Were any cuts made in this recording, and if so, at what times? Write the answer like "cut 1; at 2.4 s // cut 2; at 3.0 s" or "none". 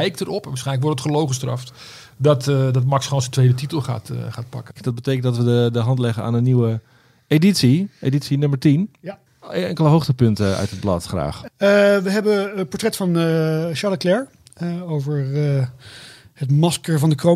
cut 1; at 4.8 s